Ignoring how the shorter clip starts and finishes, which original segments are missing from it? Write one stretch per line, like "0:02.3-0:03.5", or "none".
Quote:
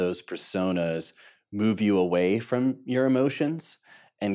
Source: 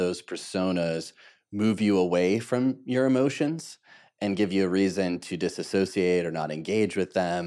none